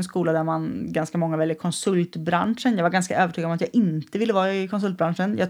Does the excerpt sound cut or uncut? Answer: uncut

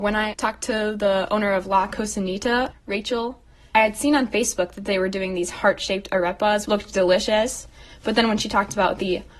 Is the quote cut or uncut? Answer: cut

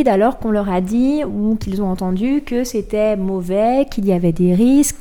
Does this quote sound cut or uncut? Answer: uncut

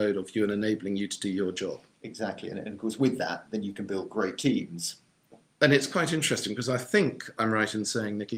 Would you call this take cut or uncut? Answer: uncut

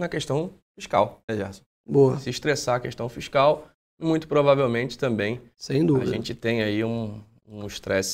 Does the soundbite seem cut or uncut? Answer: cut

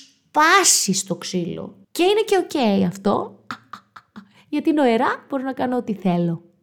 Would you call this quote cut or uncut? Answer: cut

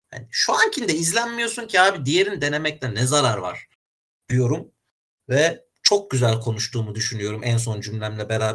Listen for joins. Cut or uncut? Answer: uncut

